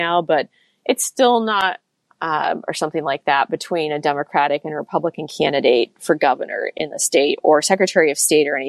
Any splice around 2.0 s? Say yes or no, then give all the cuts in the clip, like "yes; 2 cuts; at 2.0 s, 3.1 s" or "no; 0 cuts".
yes; 1 cut; at 2.0 s